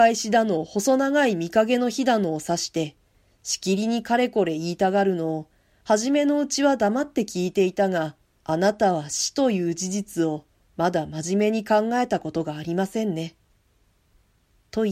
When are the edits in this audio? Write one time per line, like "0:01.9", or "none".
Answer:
0:08.4